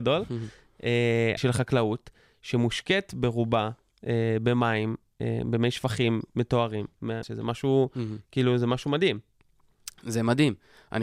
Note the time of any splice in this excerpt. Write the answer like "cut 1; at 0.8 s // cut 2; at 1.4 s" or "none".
cut 1; at 1.4 s // cut 2; at 7.2 s